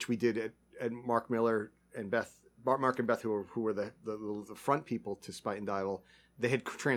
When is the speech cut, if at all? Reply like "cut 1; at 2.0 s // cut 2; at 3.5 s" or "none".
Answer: none